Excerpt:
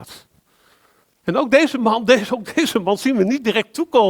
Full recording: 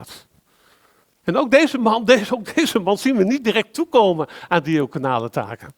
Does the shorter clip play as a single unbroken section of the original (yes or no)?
yes